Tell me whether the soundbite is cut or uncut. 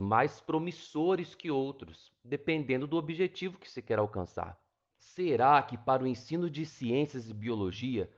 cut